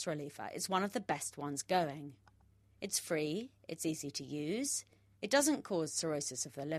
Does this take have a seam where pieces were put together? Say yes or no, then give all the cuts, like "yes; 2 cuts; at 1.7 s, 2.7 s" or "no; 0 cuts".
no; 0 cuts